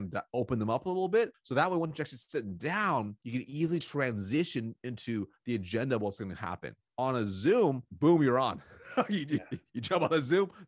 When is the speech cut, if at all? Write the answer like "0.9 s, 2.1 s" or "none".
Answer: none

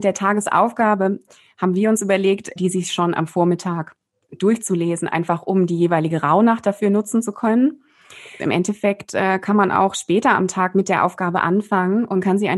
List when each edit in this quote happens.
2.6 s, 8.4 s

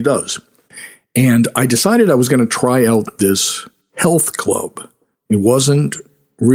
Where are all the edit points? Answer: none

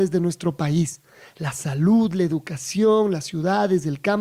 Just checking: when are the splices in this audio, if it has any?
none

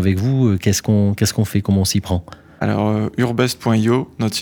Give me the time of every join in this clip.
none

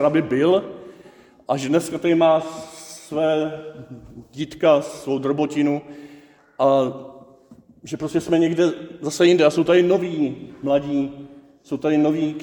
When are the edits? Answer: none

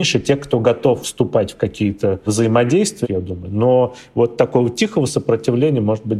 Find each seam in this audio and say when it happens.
1.0 s, 3.0 s

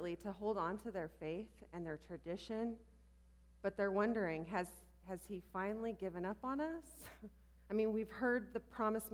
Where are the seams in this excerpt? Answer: 7.6 s

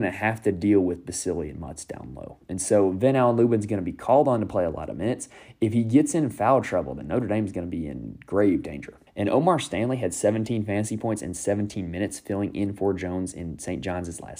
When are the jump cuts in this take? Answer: 9.1 s

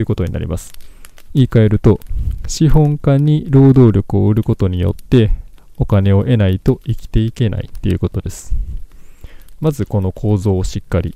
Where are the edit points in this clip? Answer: none

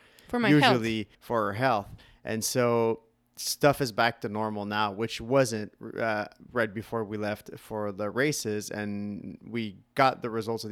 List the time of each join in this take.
1.1 s

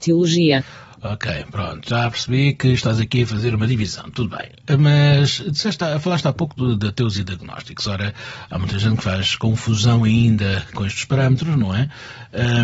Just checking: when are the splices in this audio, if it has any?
10.7 s

